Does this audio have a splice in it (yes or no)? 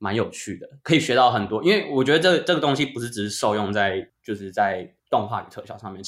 no